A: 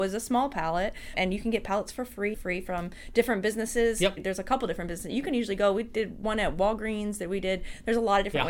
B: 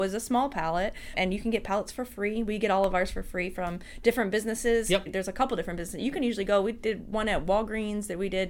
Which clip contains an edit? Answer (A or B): A